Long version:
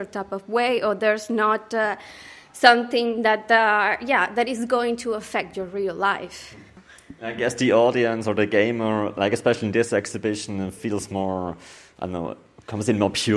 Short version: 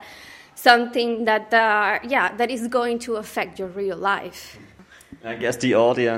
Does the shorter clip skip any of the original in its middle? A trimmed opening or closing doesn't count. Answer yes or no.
no